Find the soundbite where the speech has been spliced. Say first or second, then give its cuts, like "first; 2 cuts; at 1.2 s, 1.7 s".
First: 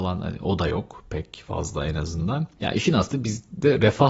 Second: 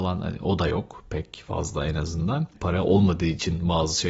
second; 1 cut; at 2.5 s